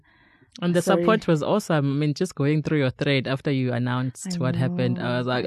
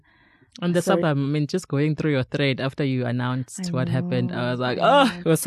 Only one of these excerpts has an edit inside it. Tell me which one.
second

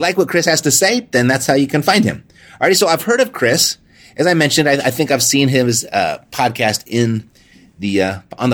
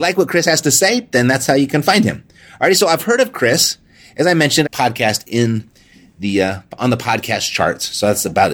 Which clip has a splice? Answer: second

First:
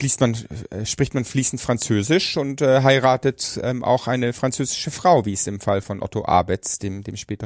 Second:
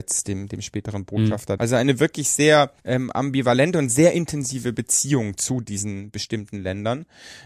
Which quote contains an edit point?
second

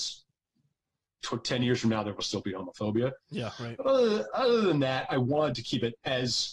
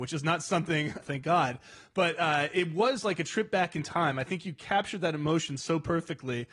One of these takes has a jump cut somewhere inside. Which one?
second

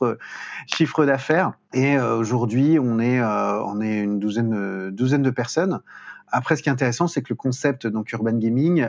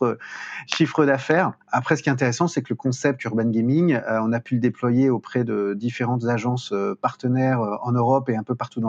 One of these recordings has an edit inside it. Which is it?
second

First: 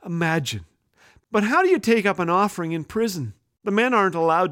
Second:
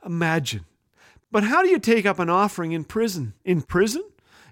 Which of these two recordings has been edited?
second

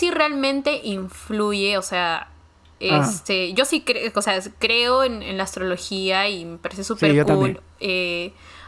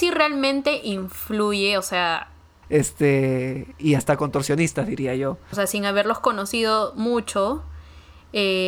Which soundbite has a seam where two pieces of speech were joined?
second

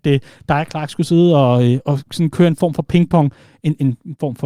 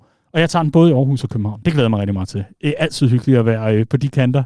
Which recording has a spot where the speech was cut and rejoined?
first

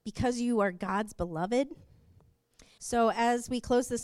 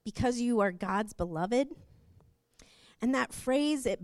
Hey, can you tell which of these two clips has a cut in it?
first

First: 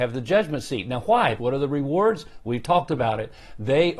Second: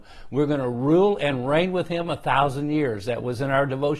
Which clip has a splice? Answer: first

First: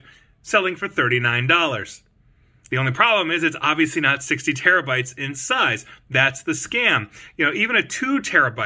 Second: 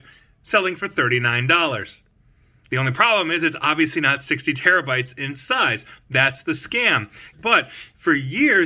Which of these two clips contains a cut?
second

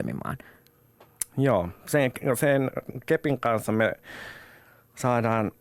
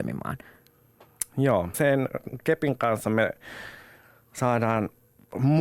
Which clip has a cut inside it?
second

